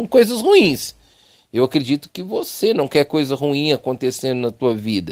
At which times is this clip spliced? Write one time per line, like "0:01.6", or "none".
none